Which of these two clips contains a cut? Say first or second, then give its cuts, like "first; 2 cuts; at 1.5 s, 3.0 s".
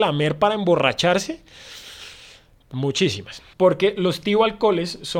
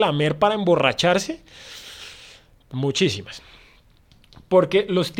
first; 1 cut; at 3.5 s